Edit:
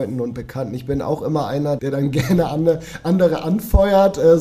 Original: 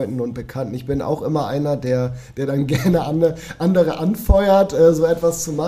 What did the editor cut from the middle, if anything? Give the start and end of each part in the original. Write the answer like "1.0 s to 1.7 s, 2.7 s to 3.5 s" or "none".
1.8 s to 2.3 s